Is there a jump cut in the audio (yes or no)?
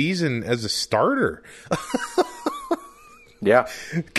no